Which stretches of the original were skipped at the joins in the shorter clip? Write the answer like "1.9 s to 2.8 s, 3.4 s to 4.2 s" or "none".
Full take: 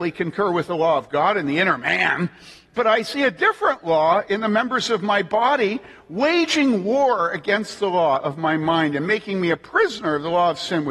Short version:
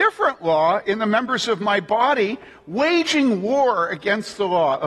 none